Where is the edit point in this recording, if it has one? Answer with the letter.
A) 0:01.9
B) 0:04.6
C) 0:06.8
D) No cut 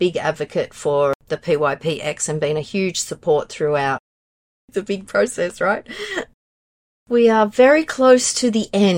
D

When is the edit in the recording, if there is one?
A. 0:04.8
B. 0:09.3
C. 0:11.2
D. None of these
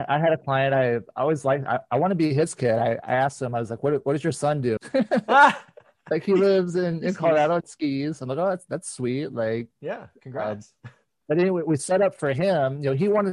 A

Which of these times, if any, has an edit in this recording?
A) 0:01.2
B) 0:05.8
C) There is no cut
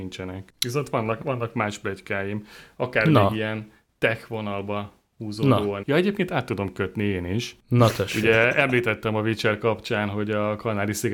B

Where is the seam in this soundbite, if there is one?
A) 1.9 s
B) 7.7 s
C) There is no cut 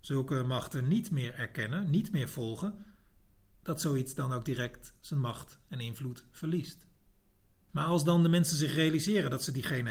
B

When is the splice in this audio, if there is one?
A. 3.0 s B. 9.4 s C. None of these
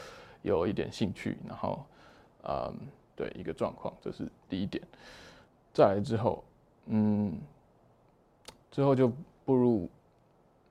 A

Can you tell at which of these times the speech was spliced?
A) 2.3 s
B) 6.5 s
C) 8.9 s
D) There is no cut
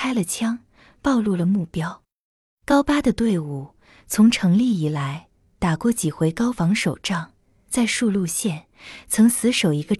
B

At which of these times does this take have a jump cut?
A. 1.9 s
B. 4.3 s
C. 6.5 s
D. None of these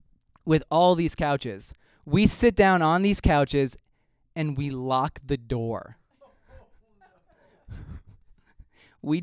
D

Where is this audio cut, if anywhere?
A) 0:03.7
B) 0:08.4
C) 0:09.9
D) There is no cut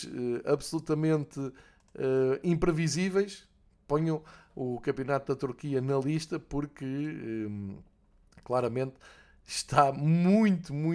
D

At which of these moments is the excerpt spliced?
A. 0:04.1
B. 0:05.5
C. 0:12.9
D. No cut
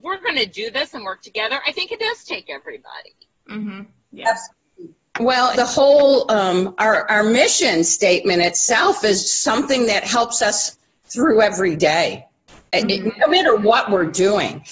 B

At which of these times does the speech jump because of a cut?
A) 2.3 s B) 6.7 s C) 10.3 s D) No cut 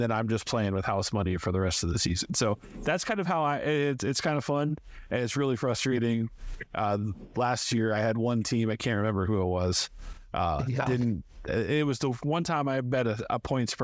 D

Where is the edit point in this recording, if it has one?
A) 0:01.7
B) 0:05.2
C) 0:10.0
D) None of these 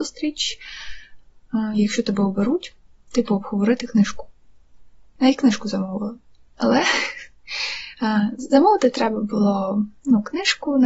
B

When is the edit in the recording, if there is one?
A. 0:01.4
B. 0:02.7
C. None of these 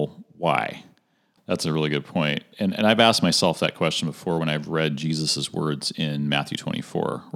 A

